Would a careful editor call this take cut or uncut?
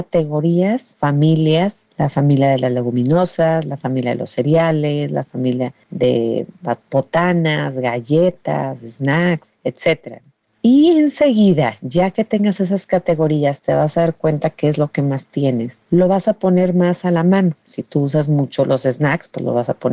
uncut